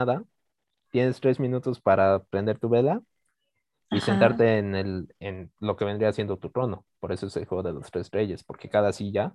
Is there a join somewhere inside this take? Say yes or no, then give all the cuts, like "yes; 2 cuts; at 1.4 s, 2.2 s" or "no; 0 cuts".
no; 0 cuts